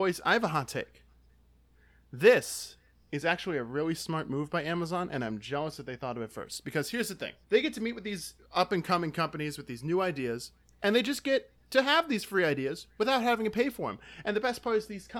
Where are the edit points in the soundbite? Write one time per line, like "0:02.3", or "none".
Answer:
0:07.4